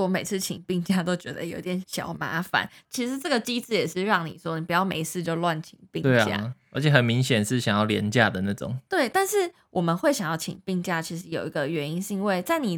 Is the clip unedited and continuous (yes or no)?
yes